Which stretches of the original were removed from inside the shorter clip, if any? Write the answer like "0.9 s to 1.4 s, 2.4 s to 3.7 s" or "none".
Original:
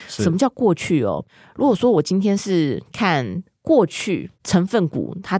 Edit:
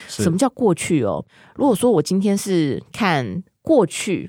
none